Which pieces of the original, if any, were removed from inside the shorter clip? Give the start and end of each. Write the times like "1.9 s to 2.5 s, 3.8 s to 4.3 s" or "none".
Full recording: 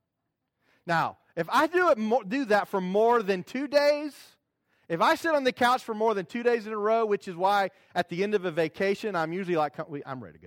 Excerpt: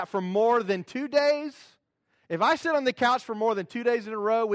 none